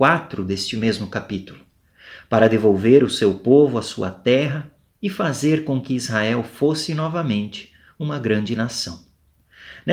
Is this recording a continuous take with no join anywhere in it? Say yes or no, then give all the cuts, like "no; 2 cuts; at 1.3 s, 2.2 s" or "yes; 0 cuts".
yes; 0 cuts